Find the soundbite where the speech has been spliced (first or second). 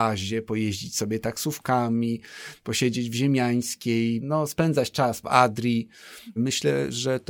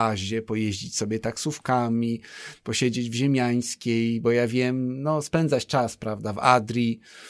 first